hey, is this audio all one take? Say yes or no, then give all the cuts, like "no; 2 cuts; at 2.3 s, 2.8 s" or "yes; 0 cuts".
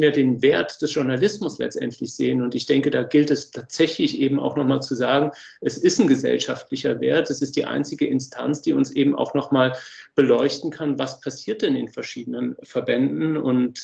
yes; 0 cuts